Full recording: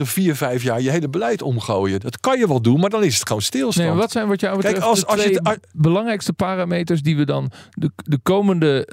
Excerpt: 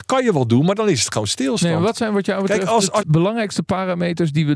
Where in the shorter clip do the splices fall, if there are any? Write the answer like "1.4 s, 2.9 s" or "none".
3.0 s